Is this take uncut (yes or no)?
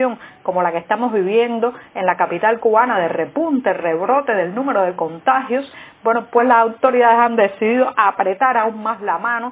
yes